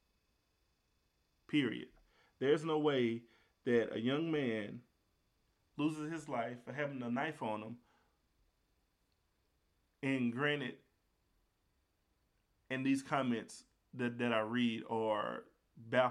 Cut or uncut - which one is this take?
uncut